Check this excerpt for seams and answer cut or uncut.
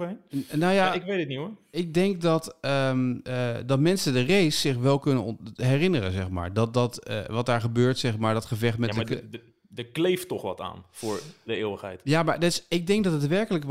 uncut